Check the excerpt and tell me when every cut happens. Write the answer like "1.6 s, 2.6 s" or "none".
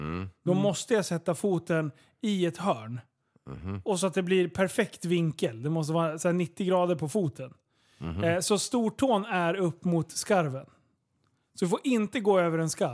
none